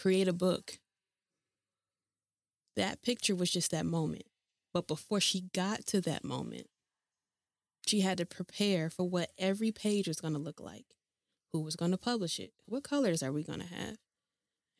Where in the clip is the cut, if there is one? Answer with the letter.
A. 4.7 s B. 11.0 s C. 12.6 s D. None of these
C